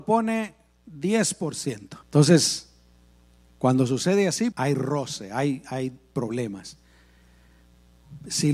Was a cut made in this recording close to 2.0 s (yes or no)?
yes